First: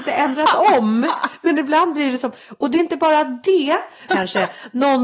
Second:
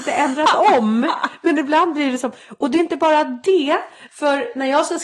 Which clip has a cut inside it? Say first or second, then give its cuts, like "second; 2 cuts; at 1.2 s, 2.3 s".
first; 1 cut; at 4.1 s